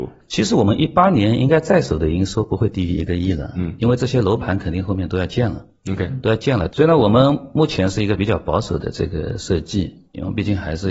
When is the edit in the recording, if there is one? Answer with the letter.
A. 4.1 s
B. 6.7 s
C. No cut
B